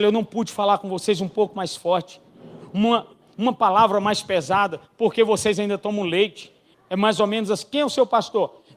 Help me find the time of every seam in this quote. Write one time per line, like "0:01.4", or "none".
0:06.7